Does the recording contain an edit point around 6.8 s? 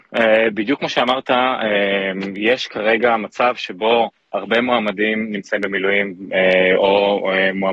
no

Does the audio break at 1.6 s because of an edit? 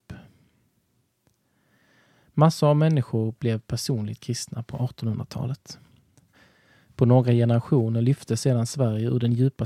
no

